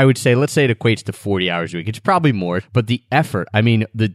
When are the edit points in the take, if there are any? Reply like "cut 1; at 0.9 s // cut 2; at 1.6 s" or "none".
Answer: cut 1; at 2.6 s